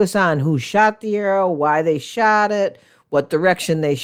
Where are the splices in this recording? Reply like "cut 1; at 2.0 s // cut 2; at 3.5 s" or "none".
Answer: none